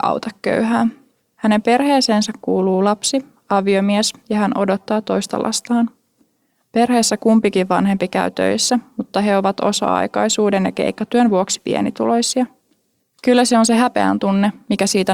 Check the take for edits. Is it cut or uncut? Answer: cut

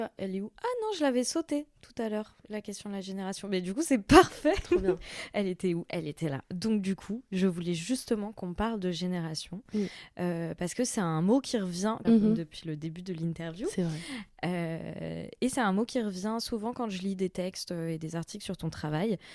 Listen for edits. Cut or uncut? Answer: cut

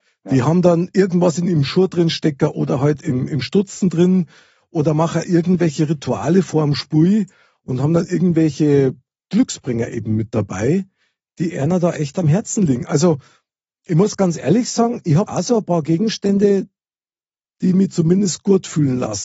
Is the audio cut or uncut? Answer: cut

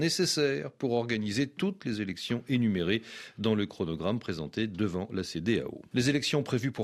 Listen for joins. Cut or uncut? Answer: cut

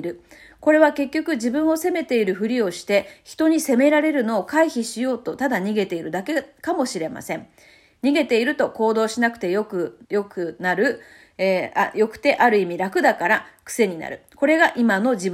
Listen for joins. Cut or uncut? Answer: cut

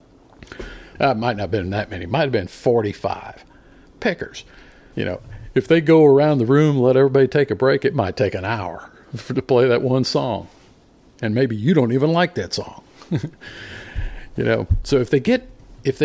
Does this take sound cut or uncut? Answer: cut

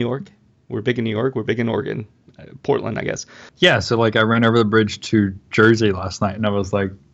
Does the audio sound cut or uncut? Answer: cut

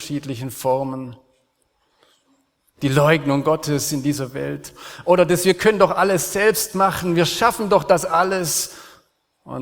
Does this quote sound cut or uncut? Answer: uncut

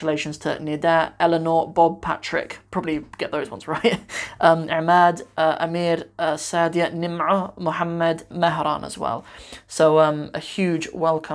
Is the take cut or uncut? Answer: cut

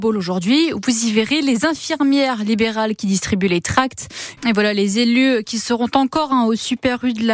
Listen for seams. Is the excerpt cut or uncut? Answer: cut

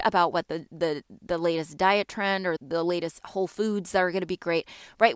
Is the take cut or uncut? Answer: cut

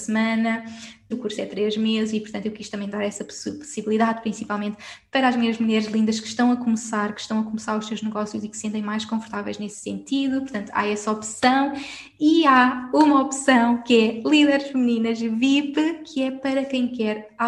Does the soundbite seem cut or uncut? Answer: cut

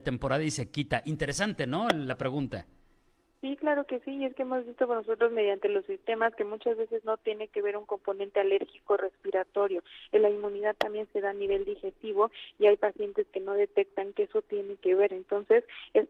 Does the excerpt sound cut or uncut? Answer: uncut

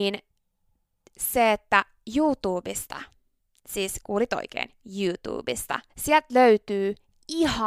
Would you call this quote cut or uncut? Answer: cut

